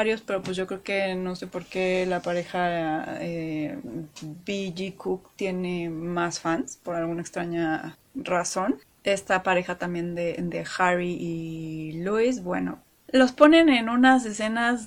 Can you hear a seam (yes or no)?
no